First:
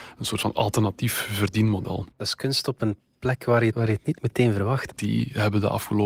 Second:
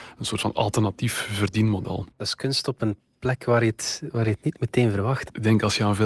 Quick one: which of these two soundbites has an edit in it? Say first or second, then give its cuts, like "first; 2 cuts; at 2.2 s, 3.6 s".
first; 2 cuts; at 3.7 s, 4.9 s